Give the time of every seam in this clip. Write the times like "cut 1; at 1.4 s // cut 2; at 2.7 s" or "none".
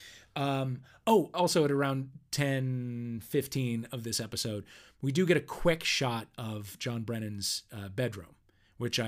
cut 1; at 1.3 s